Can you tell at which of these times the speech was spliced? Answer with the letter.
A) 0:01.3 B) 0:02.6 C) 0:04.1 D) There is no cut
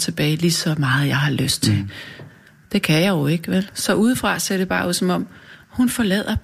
D